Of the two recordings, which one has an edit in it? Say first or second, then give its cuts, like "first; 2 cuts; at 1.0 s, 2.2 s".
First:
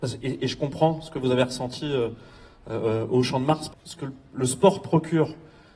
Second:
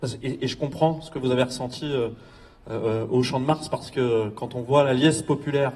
first; 1 cut; at 3.7 s